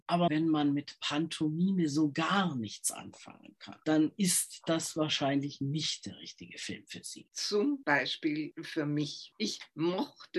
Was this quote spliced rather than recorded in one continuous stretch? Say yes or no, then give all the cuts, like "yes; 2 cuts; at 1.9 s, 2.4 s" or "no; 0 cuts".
no; 0 cuts